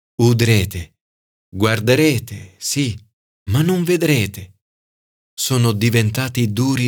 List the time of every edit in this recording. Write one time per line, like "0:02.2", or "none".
0:01.4